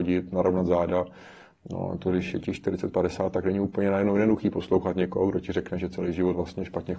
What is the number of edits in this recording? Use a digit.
0